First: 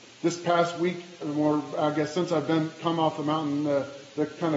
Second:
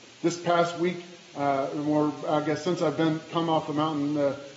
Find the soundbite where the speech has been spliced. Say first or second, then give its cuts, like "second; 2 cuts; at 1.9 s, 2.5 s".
first; 1 cut; at 1.2 s